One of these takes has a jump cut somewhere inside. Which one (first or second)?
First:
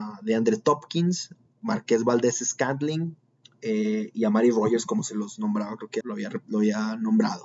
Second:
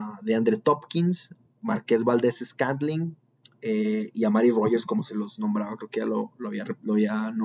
first